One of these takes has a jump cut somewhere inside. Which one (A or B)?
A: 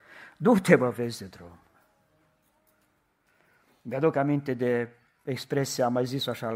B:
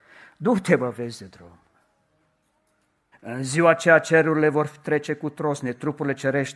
B